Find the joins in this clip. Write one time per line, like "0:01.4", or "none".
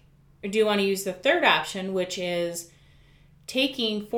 none